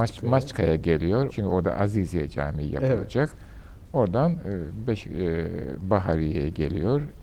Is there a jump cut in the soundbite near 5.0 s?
no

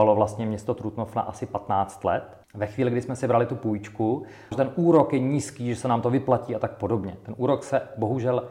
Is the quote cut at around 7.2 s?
no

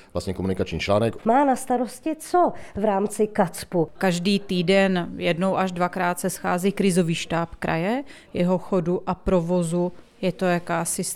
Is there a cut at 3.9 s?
yes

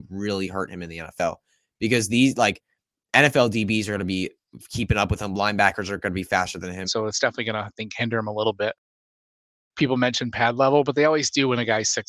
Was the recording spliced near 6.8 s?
yes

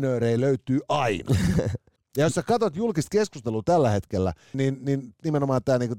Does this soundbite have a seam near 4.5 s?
yes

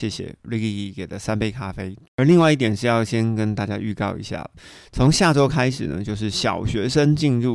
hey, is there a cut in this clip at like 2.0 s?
yes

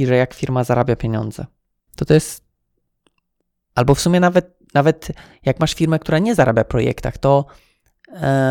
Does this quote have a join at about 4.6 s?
no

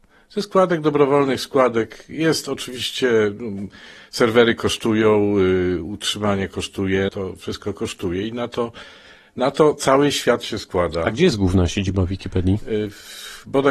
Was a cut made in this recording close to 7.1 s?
yes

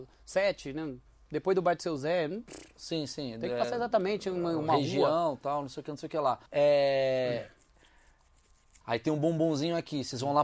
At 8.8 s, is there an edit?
yes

